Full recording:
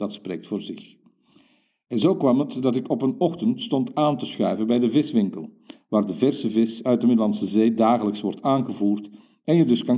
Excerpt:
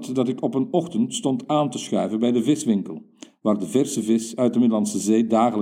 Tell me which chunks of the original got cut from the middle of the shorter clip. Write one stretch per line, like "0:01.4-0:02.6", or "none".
none

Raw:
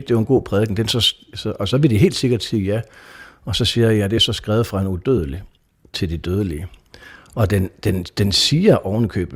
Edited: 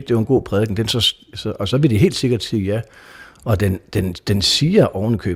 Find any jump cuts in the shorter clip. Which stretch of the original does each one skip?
0:03.3-0:07.2

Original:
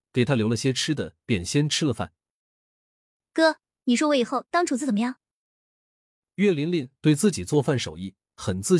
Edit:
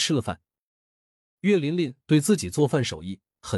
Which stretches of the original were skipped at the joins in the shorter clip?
0:03.1-0:06.3

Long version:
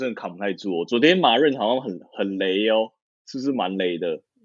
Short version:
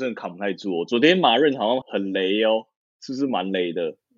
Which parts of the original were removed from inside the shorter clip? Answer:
0:01.8-0:02.1

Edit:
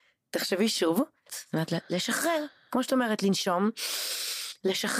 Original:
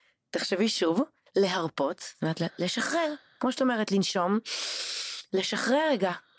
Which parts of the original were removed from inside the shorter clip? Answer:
0:01.3-0:02.0

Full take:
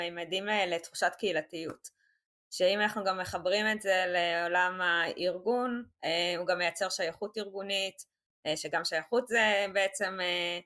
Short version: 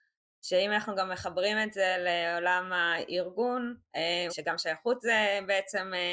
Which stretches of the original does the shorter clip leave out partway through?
0:06.4-0:08.6

